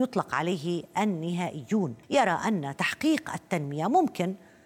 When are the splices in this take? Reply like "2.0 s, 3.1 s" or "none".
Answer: 2.0 s